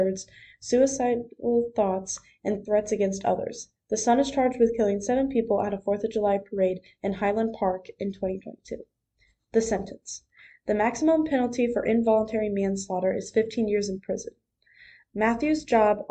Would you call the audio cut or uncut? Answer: uncut